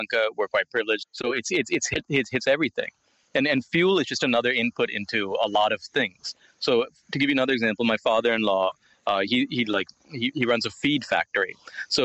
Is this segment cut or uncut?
cut